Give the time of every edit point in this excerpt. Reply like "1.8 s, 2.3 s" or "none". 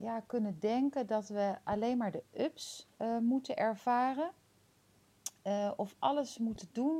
2.9 s